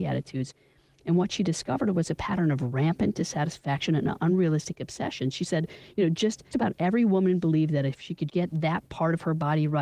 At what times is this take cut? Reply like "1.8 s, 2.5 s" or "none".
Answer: 6.5 s, 8.3 s